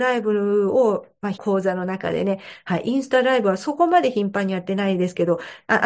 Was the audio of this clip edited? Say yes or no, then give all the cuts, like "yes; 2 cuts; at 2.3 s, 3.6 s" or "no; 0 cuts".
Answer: yes; 1 cut; at 1.3 s